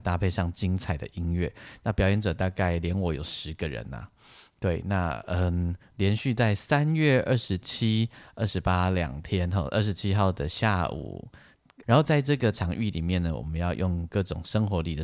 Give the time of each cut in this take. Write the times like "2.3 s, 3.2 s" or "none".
11.8 s

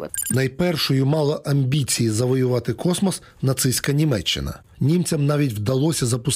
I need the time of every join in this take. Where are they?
4.7 s

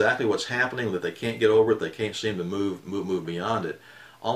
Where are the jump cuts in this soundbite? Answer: none

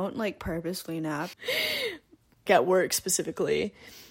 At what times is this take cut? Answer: 1.3 s, 2.5 s

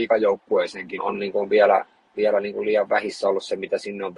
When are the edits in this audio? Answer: 1.0 s

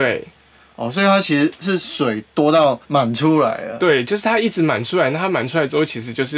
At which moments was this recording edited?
2.8 s

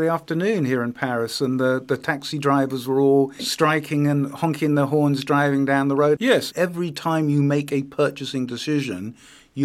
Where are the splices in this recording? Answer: 3.4 s, 6.2 s

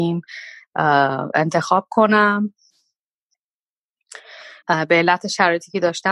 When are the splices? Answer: 4.6 s

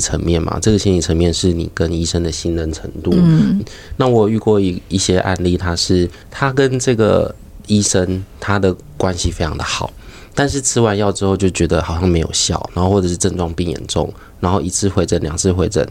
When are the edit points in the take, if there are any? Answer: 3.6 s

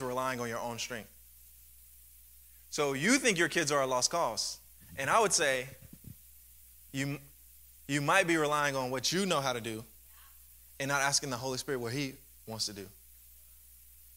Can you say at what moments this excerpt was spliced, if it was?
none

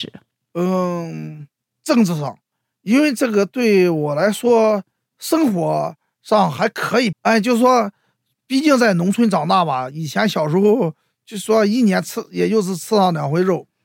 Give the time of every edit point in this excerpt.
7.1 s

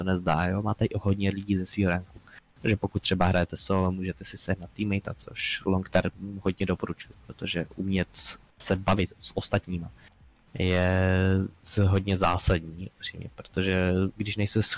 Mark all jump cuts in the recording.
none

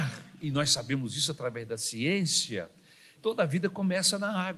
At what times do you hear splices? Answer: 3.1 s

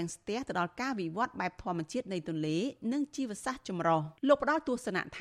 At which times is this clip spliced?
4.2 s

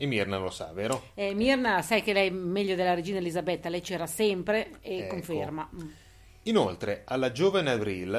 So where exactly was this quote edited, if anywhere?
none

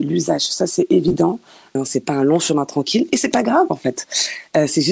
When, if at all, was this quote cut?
1.8 s

